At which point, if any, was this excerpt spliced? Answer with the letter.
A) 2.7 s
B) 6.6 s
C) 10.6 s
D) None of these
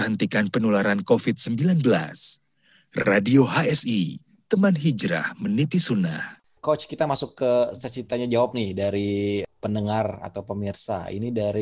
B